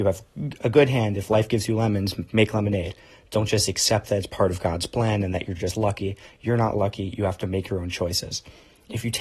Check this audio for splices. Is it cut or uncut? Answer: uncut